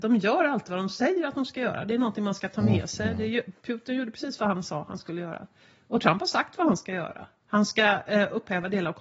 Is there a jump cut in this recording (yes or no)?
no